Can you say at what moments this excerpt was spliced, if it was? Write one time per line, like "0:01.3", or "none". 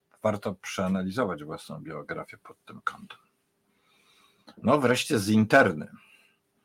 none